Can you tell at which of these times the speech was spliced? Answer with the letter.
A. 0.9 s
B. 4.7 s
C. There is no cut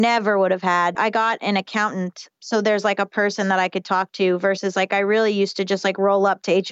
A